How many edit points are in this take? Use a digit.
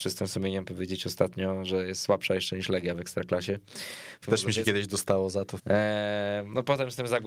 2